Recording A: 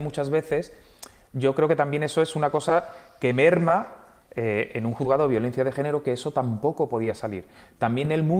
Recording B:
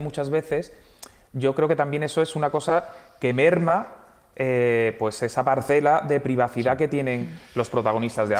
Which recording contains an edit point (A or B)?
A